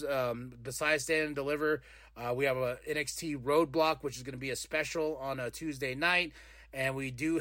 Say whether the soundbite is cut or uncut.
uncut